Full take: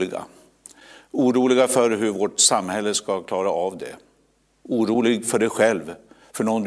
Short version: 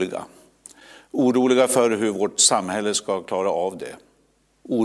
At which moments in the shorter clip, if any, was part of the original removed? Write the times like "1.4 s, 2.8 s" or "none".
none